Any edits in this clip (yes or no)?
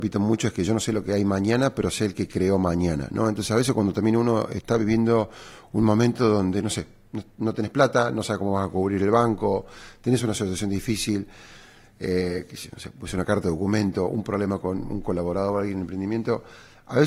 no